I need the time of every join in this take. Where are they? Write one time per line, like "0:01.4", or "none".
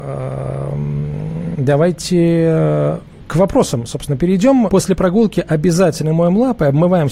0:01.5
0:04.7